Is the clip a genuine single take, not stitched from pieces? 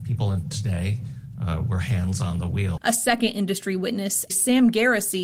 no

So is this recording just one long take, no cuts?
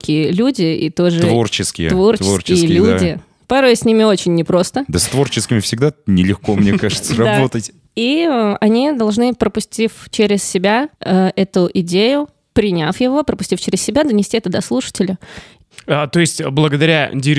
no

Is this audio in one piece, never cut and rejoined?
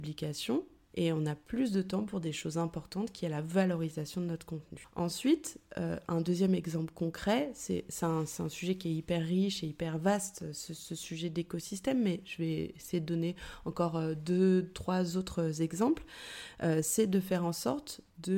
yes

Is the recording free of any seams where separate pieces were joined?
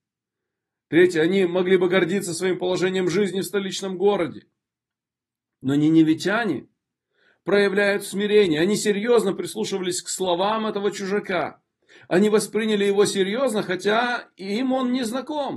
yes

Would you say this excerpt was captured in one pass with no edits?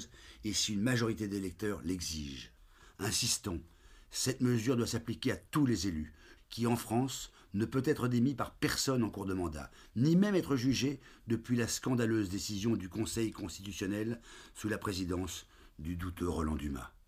no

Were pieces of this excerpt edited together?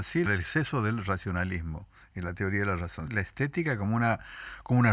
yes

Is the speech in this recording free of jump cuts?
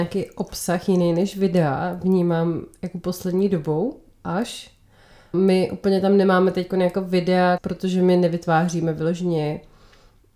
no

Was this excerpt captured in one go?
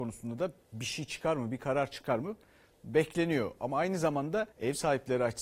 no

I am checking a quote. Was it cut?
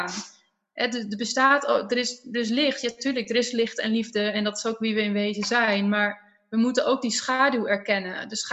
no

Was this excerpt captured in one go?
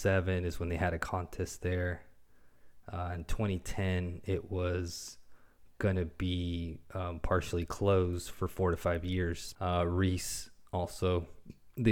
no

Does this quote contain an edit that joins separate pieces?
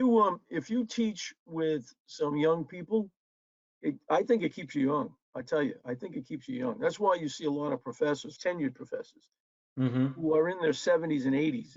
yes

